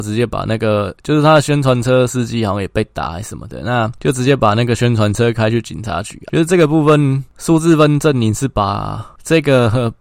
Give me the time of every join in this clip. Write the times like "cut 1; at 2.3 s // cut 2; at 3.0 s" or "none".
none

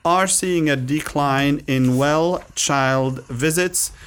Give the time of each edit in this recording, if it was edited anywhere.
none

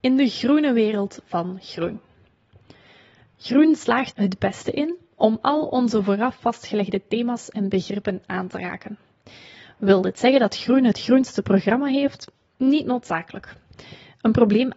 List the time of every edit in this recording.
cut 1; at 4.1 s

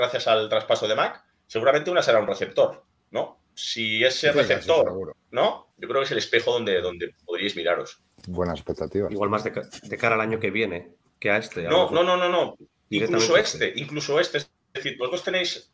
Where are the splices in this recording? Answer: cut 1; at 5.7 s

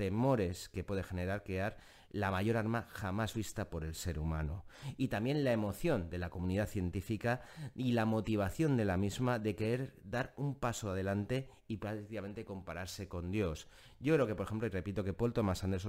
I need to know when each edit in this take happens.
none

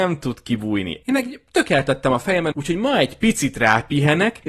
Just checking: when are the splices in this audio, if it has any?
cut 1; at 1.0 s // cut 2; at 2.5 s

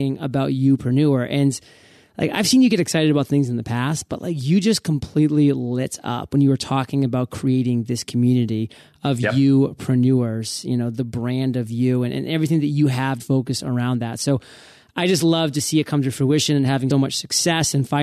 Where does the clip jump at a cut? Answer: cut 1; at 13.2 s // cut 2; at 16.9 s

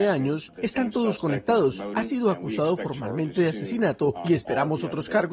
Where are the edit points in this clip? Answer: cut 1; at 1.9 s

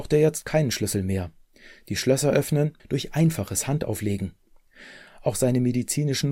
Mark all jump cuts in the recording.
cut 1; at 2.8 s

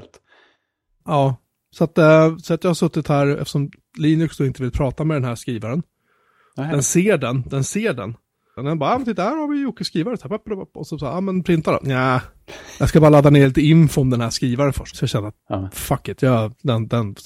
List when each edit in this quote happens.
cut 1; at 8.6 s // cut 2; at 14.9 s

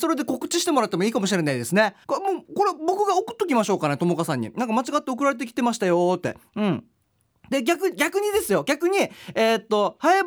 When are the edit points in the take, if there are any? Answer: cut 1; at 2.0 s

